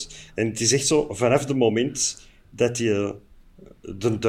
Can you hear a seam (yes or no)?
no